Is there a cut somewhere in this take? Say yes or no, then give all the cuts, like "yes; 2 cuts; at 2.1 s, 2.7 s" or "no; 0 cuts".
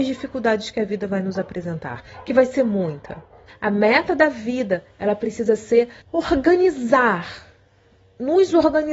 yes; 2 cuts; at 3.5 s, 6.0 s